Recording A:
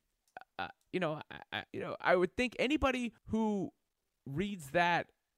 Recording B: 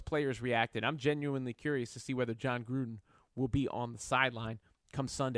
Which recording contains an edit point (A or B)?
A